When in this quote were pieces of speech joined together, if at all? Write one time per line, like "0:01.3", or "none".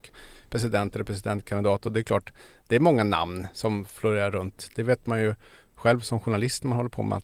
none